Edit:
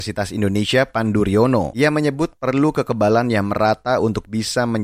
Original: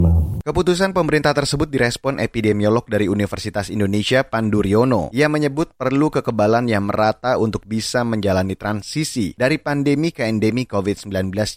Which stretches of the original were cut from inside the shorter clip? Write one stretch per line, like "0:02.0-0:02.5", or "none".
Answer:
none